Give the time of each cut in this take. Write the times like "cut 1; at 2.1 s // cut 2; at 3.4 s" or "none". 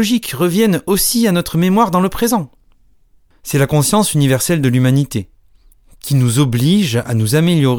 cut 1; at 3.3 s